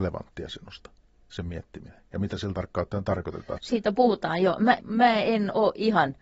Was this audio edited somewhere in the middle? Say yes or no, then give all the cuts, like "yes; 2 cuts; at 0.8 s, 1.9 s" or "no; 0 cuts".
yes; 2 cuts; at 3.6 s, 4.8 s